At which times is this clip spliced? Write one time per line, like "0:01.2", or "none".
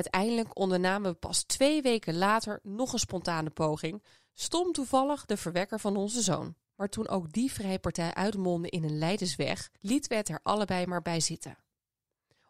0:06.6
0:09.7

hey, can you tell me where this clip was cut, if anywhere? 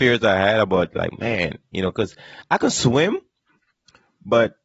none

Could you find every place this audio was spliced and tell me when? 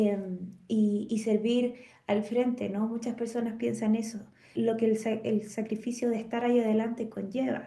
0:04.5

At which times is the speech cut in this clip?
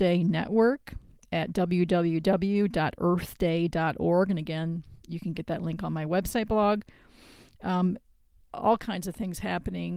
0:08.4

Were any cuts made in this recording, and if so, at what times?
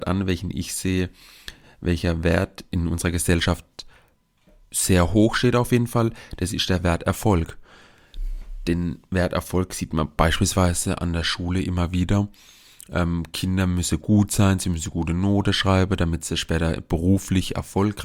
none

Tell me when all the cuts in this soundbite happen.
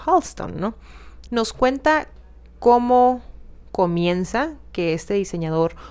0:01.3

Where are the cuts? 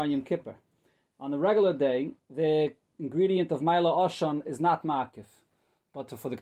0:02.2

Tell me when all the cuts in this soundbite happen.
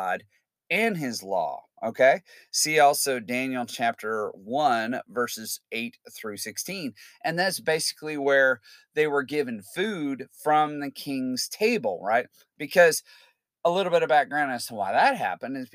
none

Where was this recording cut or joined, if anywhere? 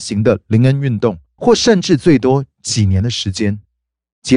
0:01.4

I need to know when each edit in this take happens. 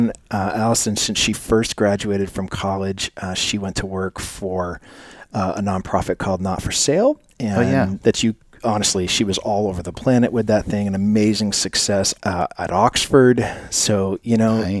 0:08.0
0:12.2

